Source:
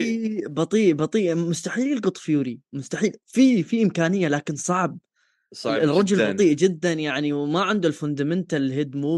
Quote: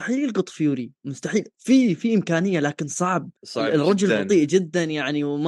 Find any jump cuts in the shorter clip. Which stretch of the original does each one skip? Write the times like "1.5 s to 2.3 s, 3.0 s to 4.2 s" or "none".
5.0 s to 5.5 s